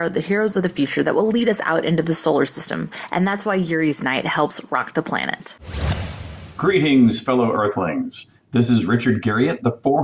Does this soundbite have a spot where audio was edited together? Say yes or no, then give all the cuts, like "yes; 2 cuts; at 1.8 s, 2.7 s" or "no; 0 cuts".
no; 0 cuts